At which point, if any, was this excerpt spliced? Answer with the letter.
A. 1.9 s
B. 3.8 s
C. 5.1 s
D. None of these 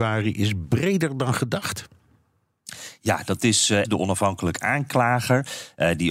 B